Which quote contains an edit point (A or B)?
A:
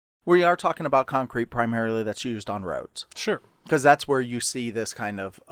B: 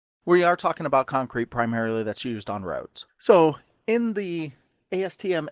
B